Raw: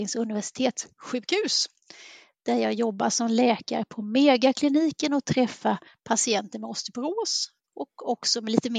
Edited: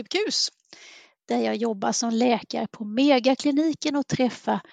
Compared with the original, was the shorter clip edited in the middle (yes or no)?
no